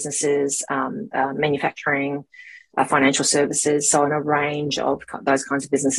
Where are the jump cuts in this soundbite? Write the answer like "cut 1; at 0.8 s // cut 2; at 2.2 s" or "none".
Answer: cut 1; at 1.1 s